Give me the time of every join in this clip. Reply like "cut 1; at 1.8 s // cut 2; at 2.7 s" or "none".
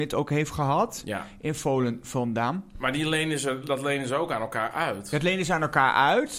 none